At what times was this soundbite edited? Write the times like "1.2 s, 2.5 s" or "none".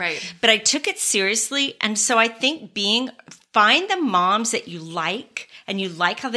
none